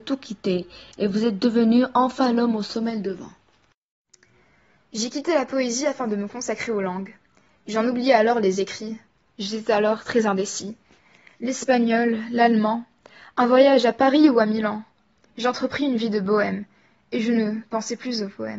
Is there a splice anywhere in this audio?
no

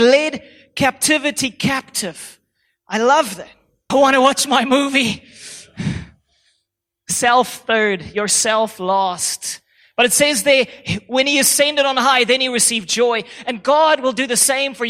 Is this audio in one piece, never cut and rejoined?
no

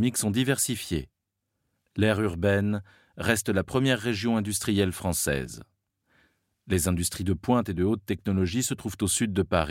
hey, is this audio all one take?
yes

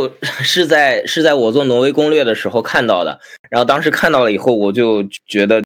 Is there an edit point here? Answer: no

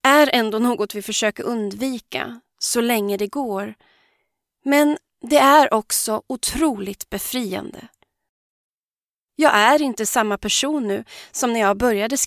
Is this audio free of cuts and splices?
yes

